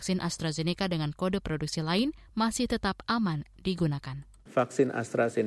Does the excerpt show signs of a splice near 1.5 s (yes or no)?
no